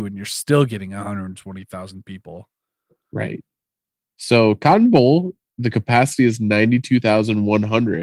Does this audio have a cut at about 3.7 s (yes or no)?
no